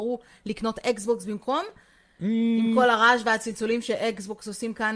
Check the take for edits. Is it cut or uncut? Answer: uncut